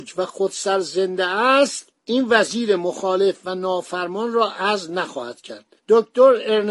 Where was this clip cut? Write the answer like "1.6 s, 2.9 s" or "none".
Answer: 2.0 s

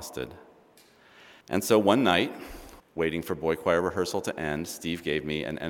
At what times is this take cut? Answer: 1.4 s, 2.8 s

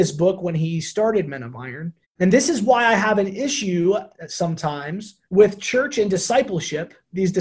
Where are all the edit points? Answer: 2.0 s, 5.2 s

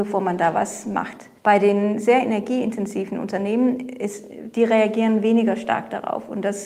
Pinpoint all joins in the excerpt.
1.4 s

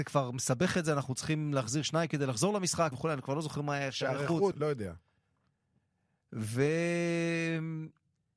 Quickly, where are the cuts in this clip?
2.9 s, 4.5 s

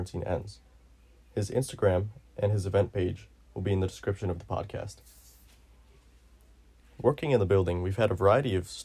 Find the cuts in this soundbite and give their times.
none

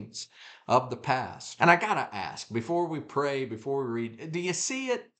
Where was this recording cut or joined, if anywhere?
1.6 s

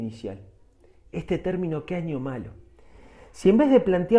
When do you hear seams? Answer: none

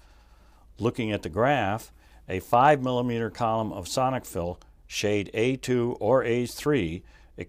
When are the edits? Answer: none

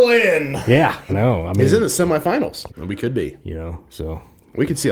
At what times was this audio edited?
1.1 s, 2.7 s

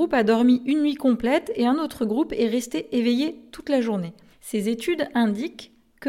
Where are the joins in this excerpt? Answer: 4.3 s

